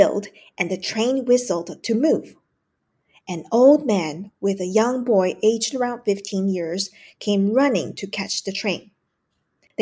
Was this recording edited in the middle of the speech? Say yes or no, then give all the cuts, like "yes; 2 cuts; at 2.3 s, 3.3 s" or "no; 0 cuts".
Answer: no; 0 cuts